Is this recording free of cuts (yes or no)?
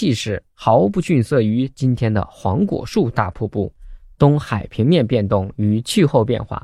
no